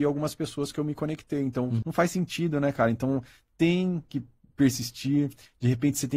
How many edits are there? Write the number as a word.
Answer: one